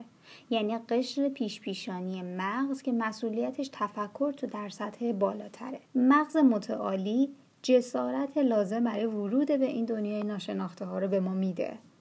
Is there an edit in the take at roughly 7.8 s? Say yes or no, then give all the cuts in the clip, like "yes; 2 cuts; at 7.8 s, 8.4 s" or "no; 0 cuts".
no; 1 cut; at 5.9 s